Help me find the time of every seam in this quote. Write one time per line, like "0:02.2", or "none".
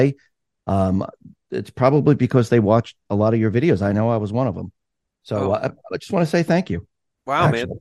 none